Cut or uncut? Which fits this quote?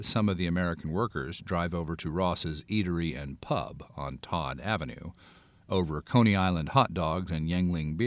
uncut